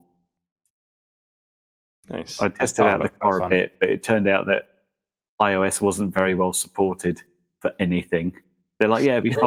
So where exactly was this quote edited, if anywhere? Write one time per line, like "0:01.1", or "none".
none